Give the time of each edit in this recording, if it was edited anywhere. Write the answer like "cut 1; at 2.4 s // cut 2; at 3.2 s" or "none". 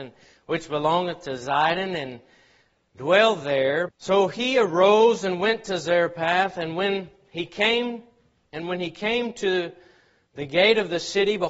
cut 1; at 3.9 s